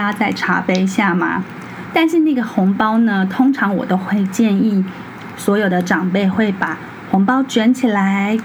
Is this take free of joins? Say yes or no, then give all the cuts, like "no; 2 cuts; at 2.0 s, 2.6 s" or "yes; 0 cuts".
no; 1 cut; at 1.9 s